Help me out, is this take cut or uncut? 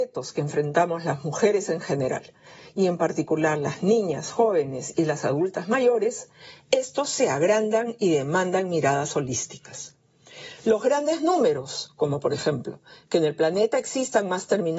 uncut